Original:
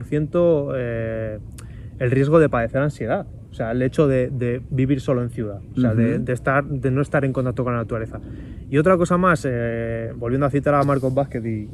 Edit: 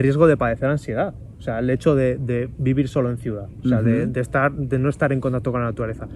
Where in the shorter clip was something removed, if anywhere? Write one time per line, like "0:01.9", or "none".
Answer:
none